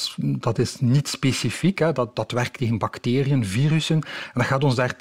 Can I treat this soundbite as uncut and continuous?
no; 1 cut; at 2.1 s

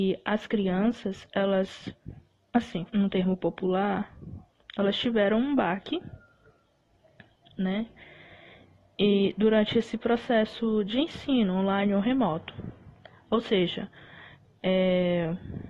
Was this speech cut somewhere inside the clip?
yes; 1 cut; at 2.9 s

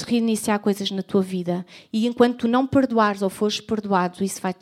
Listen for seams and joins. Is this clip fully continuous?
yes; 0 cuts

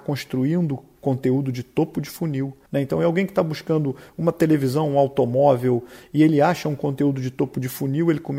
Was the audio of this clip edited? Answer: yes; 1 cut; at 2.7 s

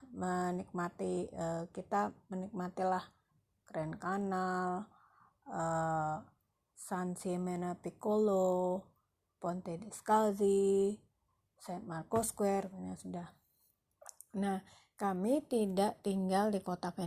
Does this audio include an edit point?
no; 0 cuts

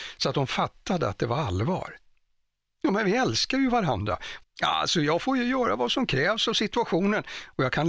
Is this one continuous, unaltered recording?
no; 1 cut; at 4.4 s

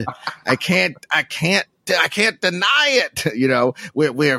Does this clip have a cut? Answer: no; 0 cuts

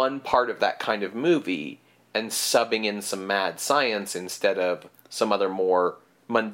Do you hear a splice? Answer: no; 0 cuts

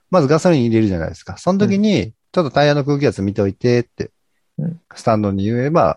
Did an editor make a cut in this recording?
yes; 1 cut; at 4.8 s

